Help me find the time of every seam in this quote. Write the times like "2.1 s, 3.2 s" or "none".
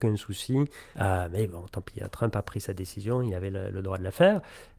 0.9 s